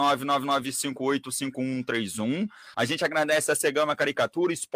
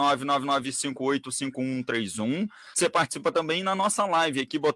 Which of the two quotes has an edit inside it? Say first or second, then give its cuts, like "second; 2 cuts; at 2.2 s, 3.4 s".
first; 1 cut; at 2.7 s